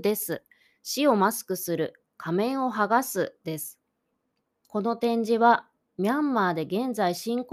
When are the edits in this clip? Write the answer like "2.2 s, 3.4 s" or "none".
none